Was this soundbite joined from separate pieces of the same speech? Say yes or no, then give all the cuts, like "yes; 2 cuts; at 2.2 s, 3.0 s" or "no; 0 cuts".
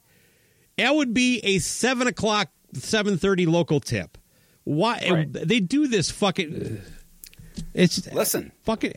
yes; 1 cut; at 6.5 s